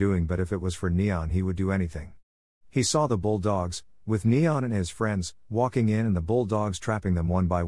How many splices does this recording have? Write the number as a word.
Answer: zero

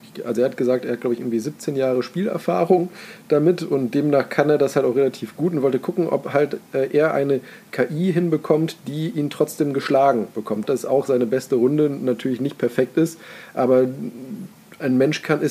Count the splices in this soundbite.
one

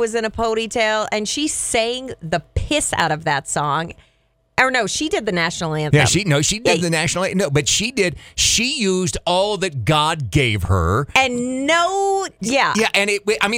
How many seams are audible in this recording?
one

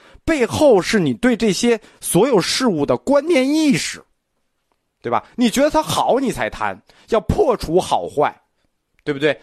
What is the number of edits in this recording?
zero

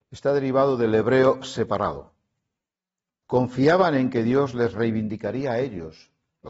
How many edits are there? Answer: one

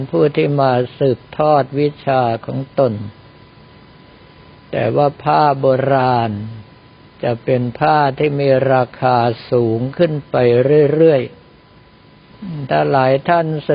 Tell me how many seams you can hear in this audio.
zero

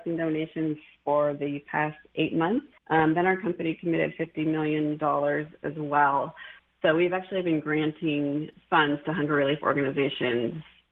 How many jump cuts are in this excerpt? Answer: one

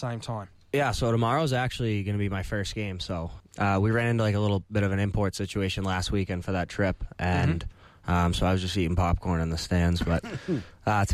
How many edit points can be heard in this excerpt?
one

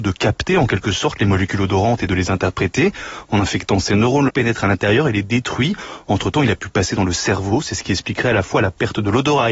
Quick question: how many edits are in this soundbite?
one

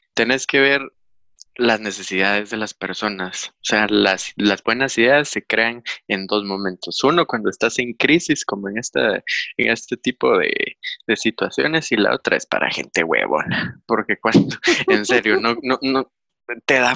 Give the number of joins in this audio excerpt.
zero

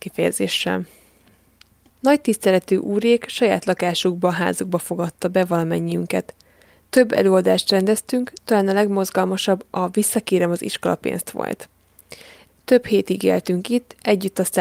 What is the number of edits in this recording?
two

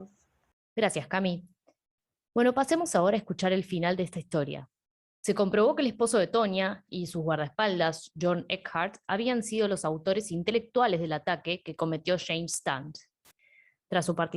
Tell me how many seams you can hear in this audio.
one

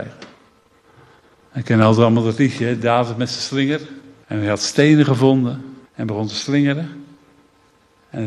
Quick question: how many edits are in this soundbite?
two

